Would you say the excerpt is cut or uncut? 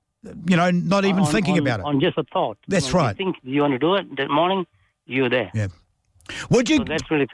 uncut